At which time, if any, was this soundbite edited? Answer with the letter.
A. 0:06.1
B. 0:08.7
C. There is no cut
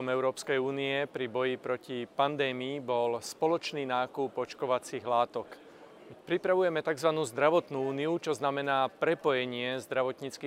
A